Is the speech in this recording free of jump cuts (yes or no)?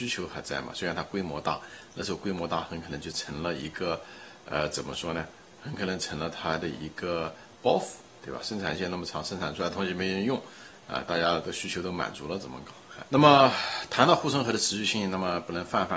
no